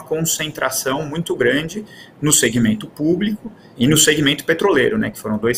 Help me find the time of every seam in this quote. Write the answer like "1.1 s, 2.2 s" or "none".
3.8 s